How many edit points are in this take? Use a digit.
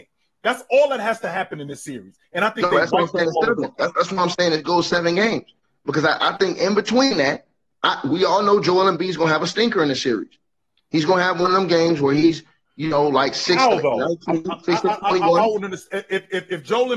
0